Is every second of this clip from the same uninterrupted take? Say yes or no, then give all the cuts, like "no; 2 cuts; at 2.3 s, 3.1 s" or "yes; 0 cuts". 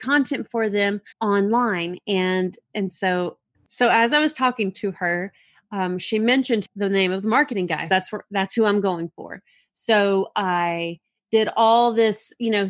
no; 2 cuts; at 1.1 s, 7.9 s